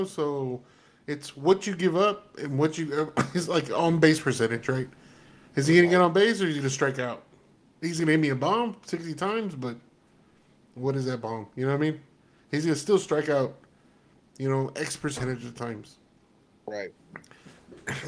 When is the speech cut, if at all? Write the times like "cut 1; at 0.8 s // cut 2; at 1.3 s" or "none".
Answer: none